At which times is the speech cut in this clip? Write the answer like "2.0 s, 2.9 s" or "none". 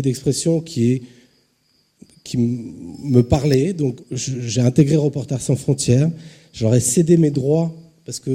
4.0 s

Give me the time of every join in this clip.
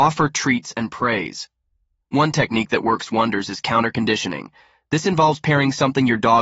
2.0 s

